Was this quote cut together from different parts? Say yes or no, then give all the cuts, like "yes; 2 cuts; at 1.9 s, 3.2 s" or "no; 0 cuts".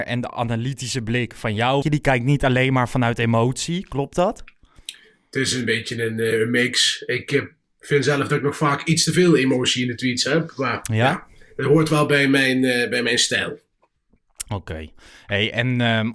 yes; 1 cut; at 1.8 s